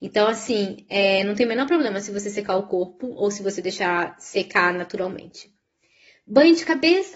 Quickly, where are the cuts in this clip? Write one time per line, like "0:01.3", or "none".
none